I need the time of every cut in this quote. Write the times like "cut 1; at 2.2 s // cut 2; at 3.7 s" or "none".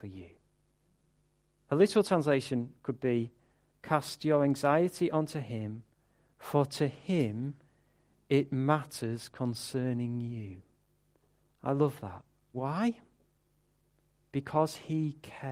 cut 1; at 12.5 s